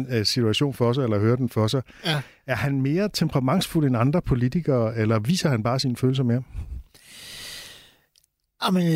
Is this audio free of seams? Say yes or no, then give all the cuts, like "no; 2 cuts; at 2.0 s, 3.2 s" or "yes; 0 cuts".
yes; 0 cuts